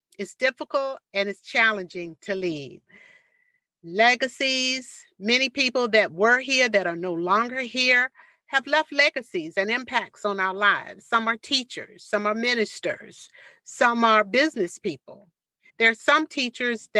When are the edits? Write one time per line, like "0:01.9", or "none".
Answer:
0:15.7